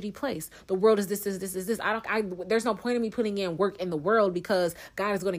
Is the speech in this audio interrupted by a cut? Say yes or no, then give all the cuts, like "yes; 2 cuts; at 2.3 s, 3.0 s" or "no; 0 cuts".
no; 0 cuts